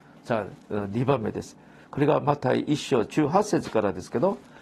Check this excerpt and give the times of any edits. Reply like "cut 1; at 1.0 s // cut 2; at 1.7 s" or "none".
cut 1; at 1.8 s